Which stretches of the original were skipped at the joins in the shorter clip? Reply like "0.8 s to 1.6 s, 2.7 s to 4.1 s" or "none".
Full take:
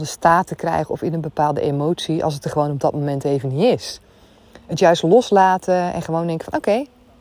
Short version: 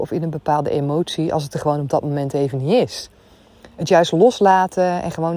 none